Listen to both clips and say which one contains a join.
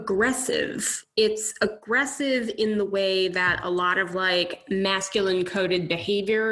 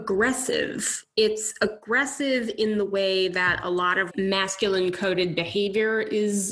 second; 1 cut; at 4.1 s

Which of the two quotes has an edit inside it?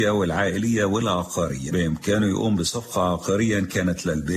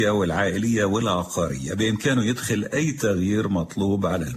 first; 1 cut; at 1.7 s

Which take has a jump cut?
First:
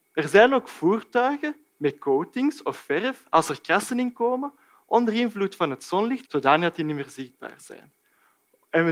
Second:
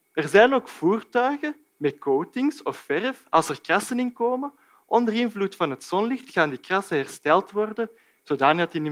first; 1 cut; at 6.2 s

